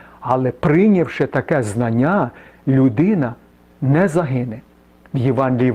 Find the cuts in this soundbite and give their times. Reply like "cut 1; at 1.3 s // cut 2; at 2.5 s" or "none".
none